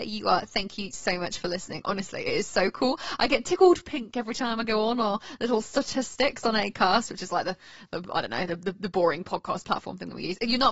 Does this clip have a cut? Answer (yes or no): no